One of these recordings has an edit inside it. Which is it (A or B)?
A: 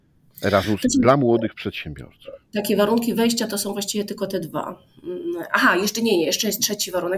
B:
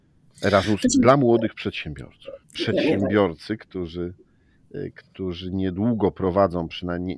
B